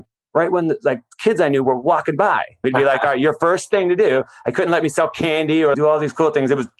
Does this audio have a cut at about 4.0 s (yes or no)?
no